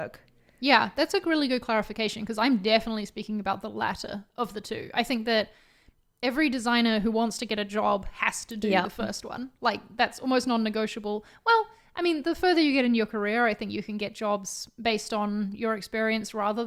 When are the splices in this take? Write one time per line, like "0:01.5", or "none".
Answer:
none